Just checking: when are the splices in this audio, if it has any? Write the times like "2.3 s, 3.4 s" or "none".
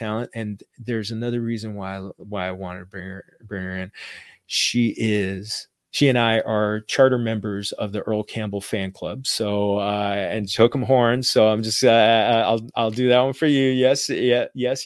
none